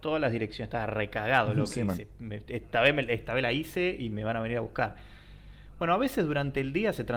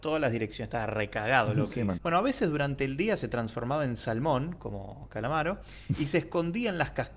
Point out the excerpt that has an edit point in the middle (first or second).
second